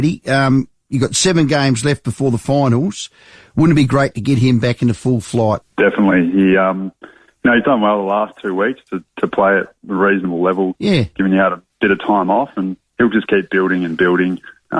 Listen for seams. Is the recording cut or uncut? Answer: cut